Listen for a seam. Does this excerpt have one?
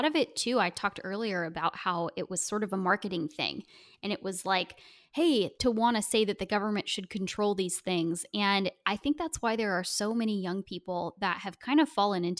yes; 1 cut; at 5.5 s

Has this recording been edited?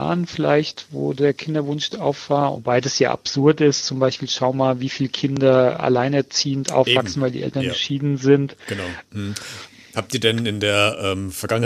yes; 2 cuts; at 2.5 s, 9.1 s

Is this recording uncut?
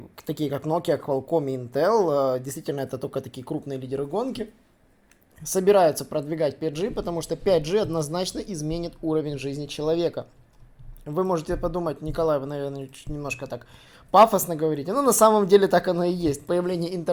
yes; 0 cuts

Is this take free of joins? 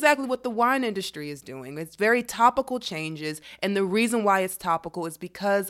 yes; 0 cuts

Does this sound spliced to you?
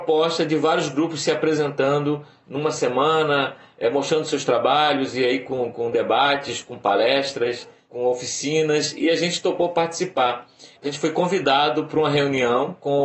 yes; 1 cut; at 10.8 s

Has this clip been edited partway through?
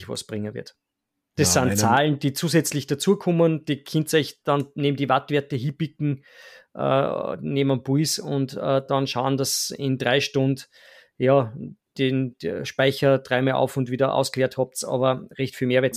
no; 0 cuts

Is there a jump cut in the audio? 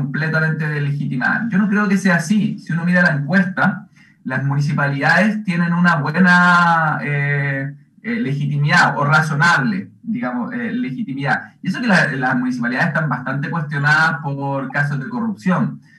no; 0 cuts

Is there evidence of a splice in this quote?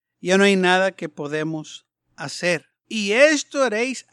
yes; 1 cut; at 2.8 s

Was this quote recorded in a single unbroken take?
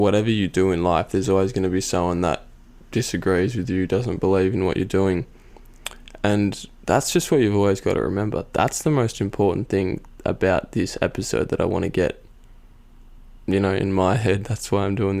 yes; 0 cuts

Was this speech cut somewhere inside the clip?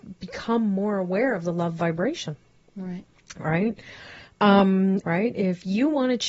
yes; 1 cut; at 5.0 s

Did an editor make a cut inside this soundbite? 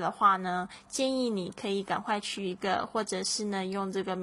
no; 0 cuts

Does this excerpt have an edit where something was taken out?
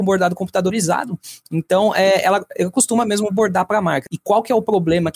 yes; 1 cut; at 4.1 s

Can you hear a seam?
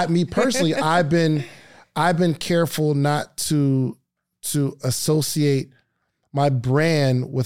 yes; 1 cut; at 4.3 s

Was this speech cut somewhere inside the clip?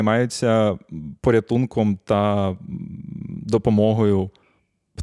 no; 0 cuts

